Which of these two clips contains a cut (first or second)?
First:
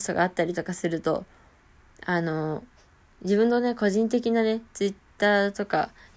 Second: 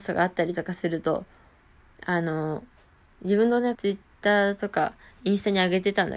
second